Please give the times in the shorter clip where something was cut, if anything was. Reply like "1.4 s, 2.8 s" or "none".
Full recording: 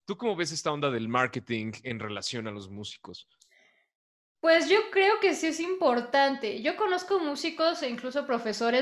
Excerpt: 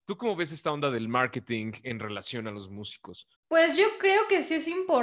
3.4 s